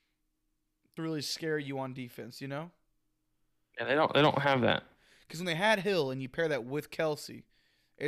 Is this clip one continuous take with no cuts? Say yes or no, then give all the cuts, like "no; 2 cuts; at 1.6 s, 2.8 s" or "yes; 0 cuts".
yes; 0 cuts